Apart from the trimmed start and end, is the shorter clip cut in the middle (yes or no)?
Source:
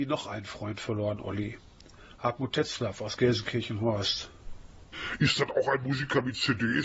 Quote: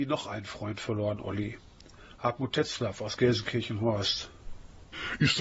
no